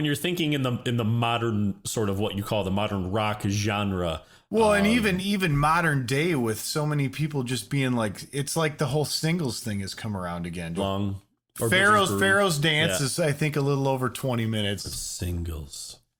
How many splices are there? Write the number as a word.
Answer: two